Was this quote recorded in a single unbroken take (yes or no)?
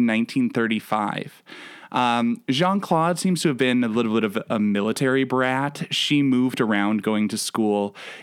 yes